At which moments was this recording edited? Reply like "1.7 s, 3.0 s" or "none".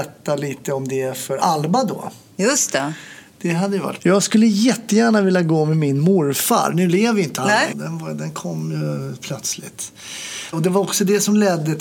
4.0 s, 7.7 s, 10.5 s